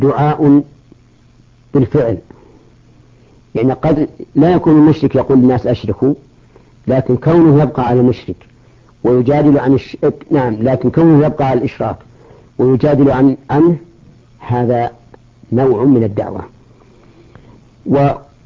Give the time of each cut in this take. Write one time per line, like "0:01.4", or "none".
none